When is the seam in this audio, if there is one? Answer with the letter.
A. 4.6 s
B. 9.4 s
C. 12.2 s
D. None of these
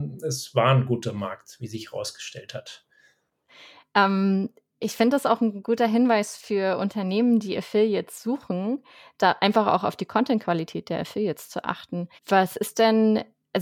C